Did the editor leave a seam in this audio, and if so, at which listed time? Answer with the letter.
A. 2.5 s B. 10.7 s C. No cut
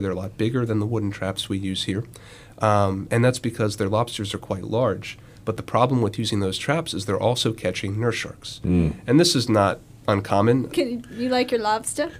B